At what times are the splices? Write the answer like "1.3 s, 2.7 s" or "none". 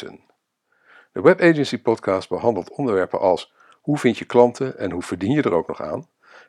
none